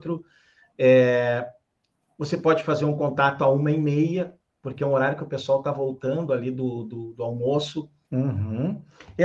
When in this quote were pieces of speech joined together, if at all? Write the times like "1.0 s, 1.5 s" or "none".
8.0 s